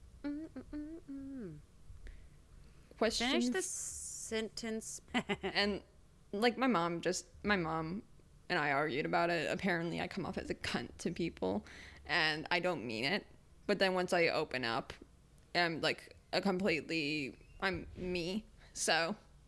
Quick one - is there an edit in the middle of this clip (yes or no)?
yes